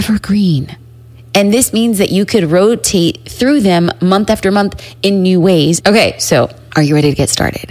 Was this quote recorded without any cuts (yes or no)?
no